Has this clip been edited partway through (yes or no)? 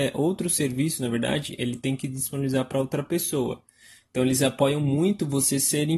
no